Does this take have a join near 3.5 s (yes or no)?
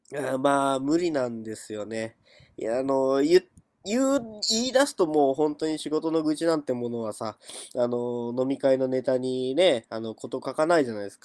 no